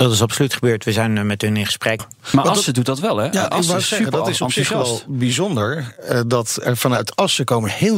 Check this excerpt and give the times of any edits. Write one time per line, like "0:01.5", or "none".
0:02.0